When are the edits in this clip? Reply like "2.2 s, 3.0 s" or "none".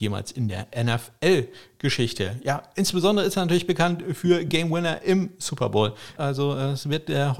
6.2 s